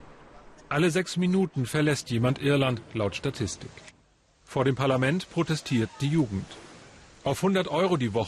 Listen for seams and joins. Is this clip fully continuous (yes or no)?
yes